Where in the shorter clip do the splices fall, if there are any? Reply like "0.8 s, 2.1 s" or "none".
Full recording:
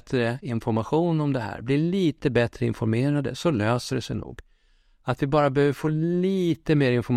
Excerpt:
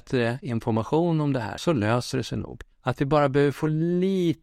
1.6 s, 2.7 s